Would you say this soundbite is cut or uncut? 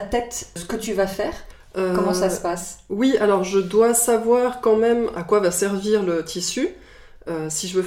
uncut